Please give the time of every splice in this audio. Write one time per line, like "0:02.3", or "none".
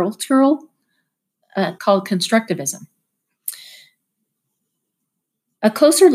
0:01.8

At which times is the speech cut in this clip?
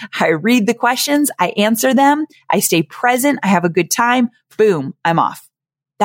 none

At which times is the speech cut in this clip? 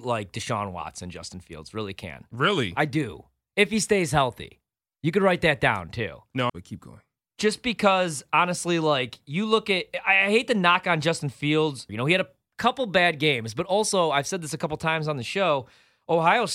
0:06.5
0:11.9

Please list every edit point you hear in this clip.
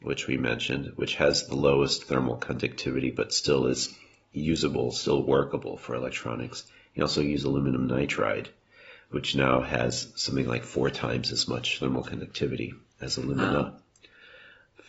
none

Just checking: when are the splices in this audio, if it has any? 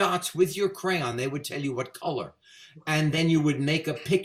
none

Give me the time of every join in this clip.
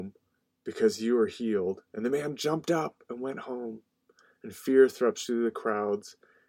none

